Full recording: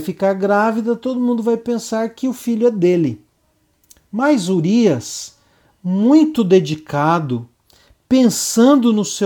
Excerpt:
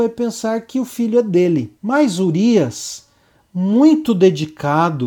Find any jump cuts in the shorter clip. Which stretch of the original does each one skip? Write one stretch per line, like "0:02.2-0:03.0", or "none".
0:03.3-0:04.1